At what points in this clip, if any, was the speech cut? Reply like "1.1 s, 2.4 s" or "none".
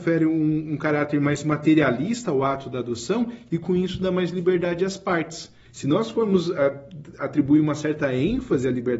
5.6 s